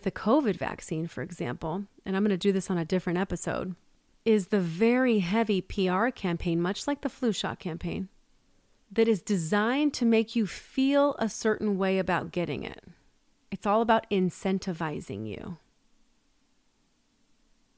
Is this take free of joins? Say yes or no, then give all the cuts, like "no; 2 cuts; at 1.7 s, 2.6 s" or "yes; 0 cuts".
yes; 0 cuts